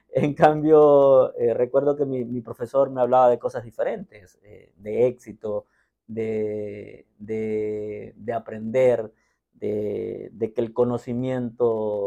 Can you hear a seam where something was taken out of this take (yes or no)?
no